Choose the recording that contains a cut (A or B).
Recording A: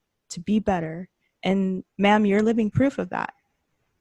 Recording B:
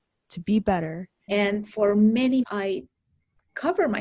B